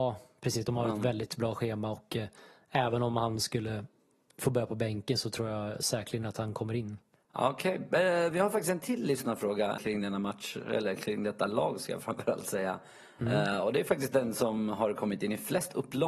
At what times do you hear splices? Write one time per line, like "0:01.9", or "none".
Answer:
0:09.8